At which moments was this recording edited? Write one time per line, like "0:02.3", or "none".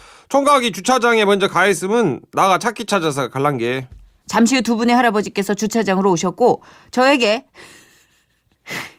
0:04.2

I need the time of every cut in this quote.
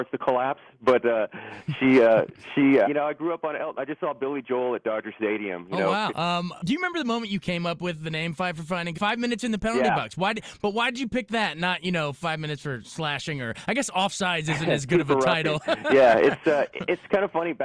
0:02.8
0:06.1
0:08.9

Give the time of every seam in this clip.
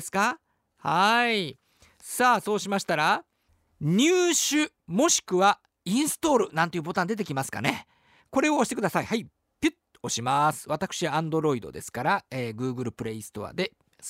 none

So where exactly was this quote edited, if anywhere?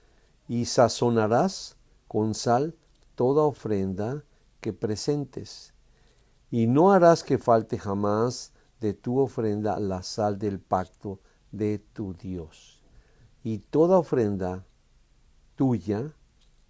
none

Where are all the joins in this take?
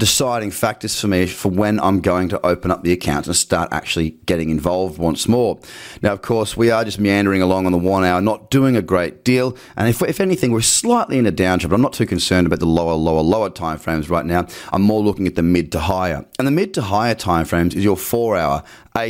none

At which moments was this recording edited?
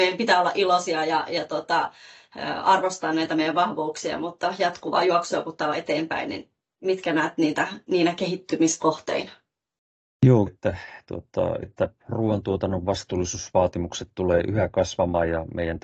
0:10.5
0:11.6

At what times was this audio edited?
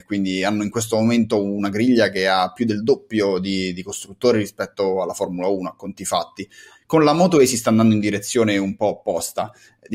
none

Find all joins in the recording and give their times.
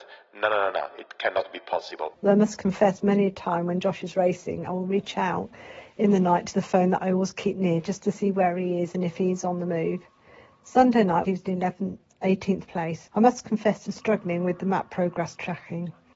0:02.1
0:11.2
0:13.1

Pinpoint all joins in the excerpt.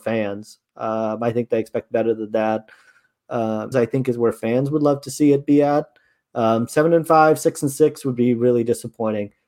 0:03.7

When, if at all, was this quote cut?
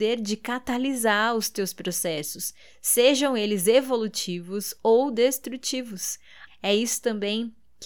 0:06.5

